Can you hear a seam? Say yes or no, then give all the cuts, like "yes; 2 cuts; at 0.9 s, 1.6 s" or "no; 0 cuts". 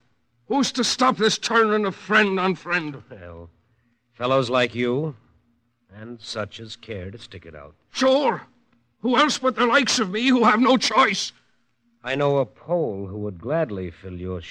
no; 0 cuts